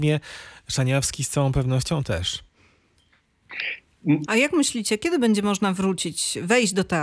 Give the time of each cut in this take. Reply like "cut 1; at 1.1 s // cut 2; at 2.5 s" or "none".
cut 1; at 4.2 s